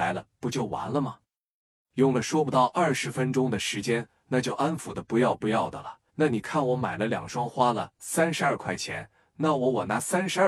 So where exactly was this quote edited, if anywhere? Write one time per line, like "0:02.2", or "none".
0:04.2
0:06.1